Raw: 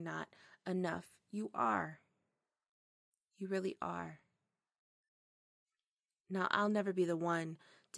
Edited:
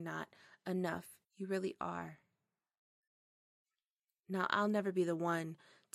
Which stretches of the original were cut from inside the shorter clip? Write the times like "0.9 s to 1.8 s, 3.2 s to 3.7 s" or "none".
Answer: 1.2 s to 3.2 s